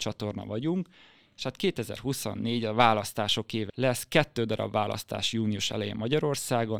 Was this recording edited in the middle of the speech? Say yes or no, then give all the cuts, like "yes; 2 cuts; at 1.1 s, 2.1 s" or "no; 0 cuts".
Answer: yes; 1 cut; at 3.7 s